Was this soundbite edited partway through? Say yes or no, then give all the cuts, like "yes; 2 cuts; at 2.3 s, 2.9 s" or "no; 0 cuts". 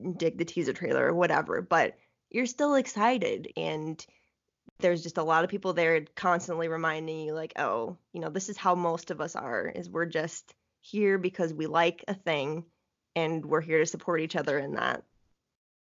yes; 1 cut; at 3.5 s